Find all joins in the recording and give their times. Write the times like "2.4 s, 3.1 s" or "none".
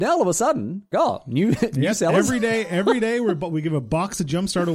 0.9 s